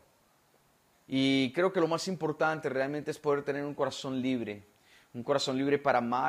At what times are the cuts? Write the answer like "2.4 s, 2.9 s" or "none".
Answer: 0.9 s